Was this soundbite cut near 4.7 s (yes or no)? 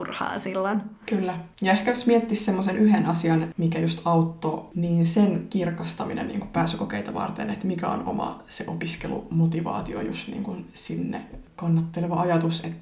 no